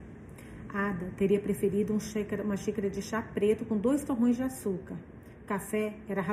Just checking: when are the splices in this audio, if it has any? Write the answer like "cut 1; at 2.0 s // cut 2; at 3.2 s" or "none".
none